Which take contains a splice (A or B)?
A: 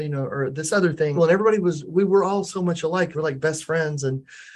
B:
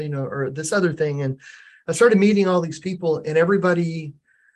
A